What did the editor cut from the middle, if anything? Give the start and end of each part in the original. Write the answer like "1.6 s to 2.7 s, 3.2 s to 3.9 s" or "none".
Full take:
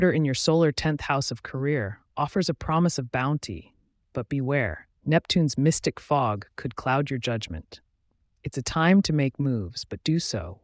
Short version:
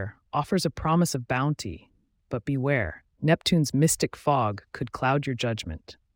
none